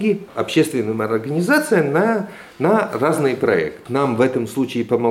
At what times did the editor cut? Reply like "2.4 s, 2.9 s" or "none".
none